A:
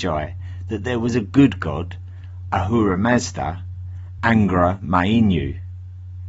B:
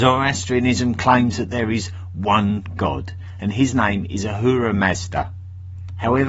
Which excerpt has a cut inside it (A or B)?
A